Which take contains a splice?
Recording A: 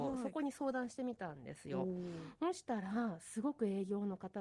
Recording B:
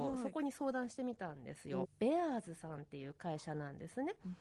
B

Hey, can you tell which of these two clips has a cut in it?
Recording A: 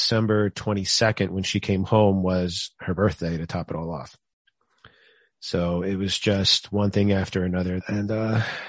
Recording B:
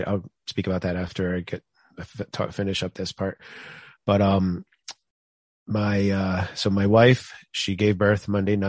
A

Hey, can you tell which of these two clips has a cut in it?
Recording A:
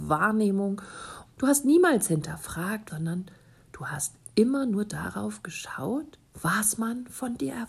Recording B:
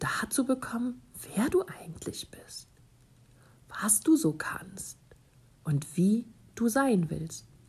A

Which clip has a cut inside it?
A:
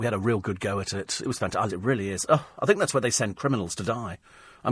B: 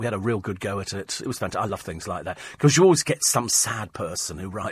A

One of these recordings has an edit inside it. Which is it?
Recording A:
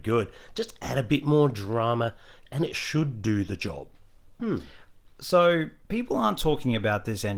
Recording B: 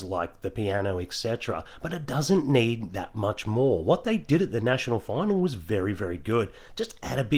A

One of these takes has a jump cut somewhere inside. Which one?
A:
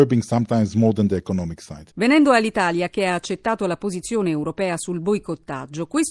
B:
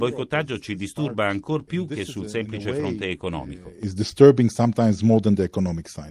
A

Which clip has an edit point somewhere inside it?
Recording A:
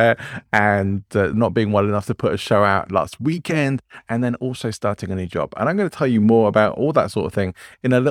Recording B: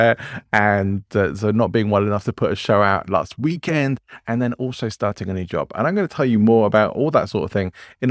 A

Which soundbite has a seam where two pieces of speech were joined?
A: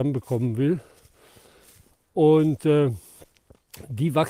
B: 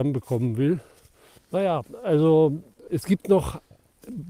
B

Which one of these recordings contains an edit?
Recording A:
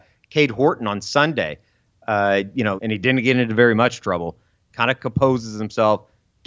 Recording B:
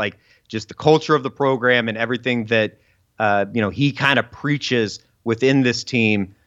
A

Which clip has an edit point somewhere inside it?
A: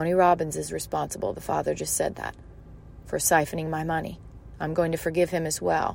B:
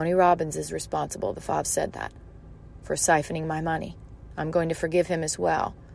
B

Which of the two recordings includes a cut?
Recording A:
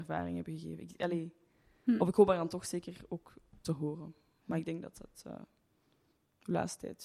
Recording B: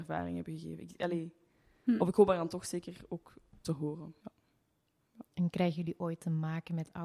B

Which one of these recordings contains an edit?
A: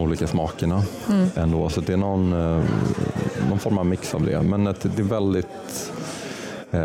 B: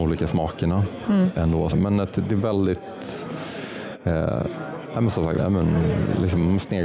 B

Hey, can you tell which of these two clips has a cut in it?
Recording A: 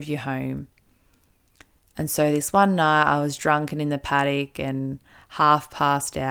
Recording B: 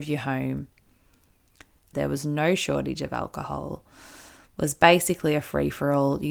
B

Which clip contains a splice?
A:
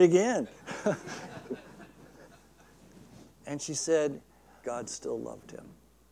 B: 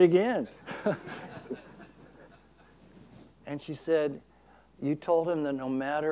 A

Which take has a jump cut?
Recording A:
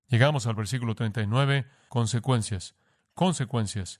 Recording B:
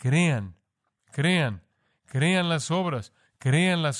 A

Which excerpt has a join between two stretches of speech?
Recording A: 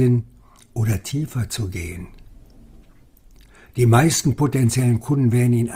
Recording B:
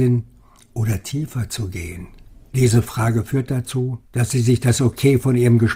B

